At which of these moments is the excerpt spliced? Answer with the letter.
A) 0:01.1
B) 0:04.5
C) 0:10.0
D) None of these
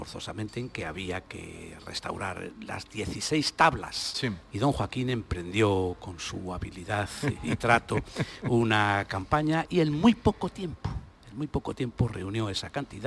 B